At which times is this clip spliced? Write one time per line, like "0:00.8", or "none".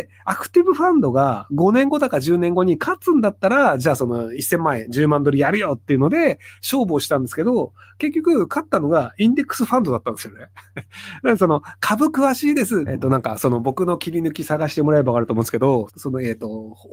0:12.9
0:15.9

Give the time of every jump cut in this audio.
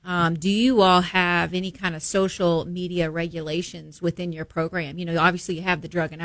none

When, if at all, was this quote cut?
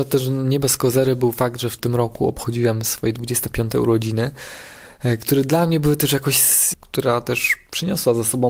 0:06.7

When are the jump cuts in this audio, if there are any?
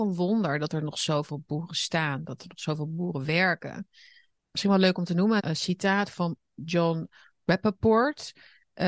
0:05.4

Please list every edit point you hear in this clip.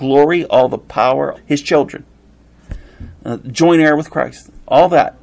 0:01.3

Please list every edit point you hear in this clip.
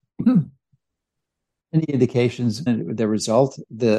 0:02.7

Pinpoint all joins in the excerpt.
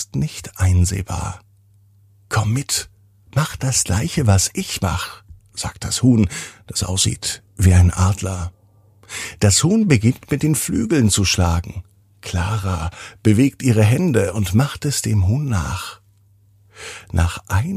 none

